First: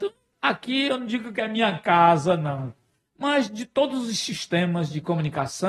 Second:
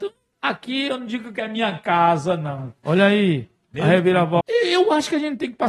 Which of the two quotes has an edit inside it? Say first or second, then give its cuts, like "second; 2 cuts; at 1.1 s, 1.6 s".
second; 2 cuts; at 2.8 s, 4.4 s